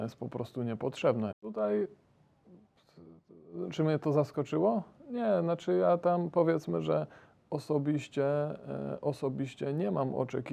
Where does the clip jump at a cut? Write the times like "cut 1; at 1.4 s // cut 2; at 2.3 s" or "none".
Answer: cut 1; at 1.3 s